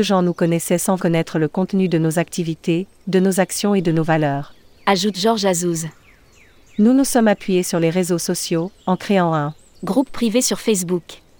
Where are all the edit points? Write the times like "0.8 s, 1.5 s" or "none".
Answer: 1.0 s